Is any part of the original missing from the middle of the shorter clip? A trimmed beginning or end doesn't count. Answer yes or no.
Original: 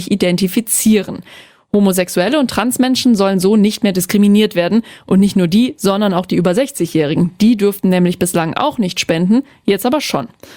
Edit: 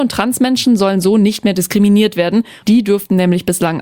yes